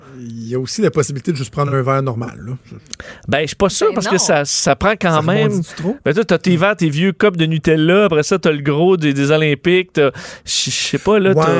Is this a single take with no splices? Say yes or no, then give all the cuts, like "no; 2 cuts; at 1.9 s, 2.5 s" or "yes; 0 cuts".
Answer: yes; 0 cuts